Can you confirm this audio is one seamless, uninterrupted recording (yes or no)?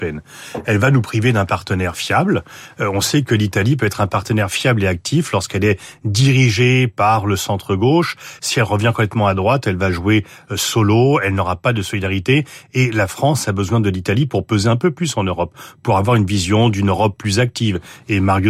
yes